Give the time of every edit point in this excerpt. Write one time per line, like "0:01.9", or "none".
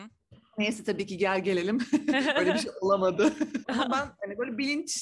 0:03.6